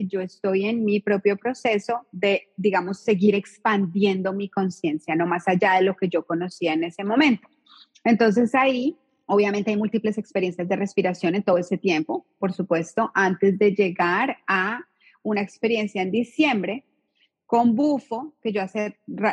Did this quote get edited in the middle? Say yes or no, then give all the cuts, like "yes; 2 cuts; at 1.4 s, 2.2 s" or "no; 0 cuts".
no; 0 cuts